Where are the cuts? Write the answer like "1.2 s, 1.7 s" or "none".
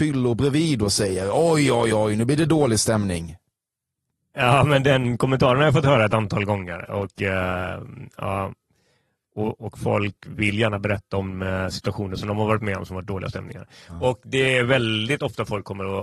none

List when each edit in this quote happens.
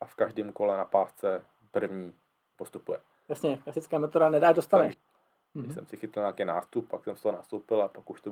3.1 s, 4.9 s

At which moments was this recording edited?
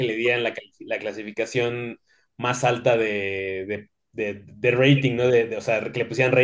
none

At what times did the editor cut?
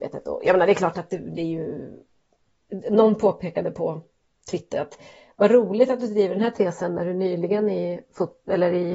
none

